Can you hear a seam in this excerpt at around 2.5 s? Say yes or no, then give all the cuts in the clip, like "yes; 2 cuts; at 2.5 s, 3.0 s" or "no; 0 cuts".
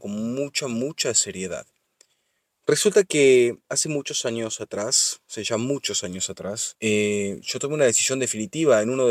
yes; 2 cuts; at 2.5 s, 6.7 s